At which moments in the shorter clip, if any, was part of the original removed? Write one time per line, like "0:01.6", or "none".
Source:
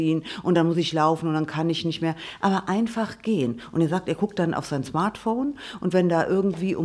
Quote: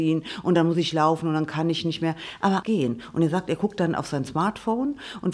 0:02.6

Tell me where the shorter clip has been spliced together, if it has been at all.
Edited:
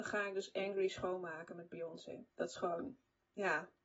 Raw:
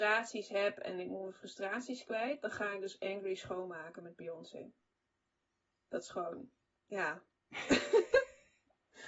0:02.3

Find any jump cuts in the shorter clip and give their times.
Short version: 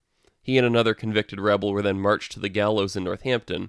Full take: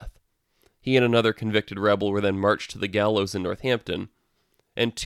none

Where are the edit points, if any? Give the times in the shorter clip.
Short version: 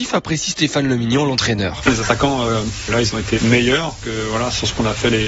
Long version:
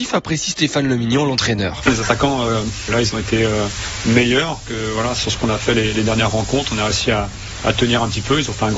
0:03.4

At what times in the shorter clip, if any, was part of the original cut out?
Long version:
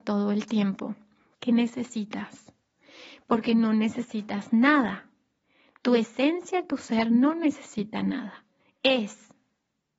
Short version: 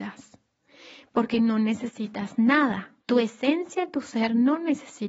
0:03.0

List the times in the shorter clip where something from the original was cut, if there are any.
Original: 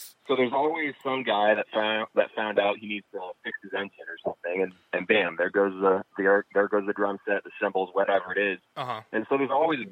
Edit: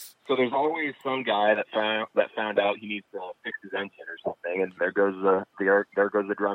0:04.8

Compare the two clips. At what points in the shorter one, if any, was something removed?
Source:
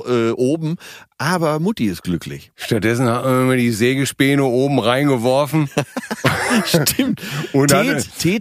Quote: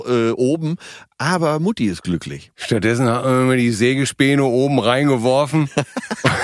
none

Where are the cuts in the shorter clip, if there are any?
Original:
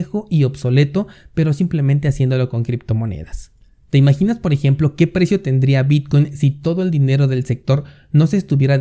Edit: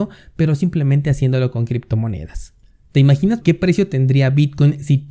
0:03.4

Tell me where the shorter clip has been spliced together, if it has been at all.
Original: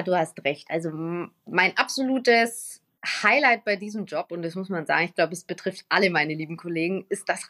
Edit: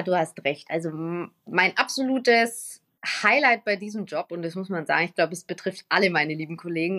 none

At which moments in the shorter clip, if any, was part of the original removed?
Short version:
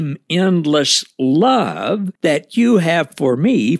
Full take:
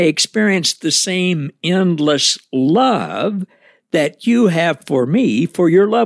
0:02.2

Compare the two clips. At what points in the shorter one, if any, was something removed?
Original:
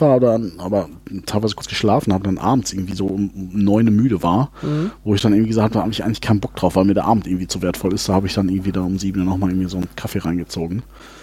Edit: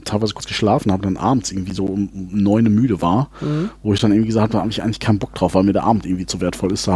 none

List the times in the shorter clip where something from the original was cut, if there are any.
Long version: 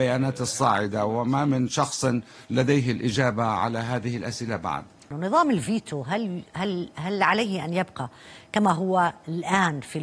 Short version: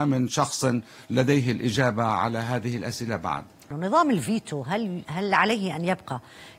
0:05.0

